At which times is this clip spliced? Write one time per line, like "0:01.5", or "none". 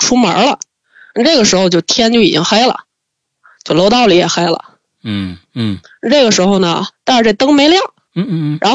0:05.4
0:06.9